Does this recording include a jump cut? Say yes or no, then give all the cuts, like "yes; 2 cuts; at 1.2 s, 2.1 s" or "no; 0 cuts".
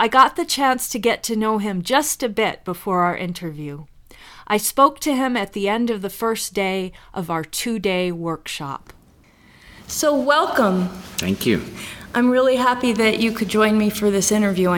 no; 0 cuts